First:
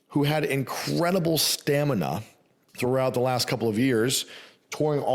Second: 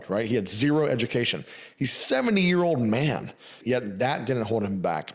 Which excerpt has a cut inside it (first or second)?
second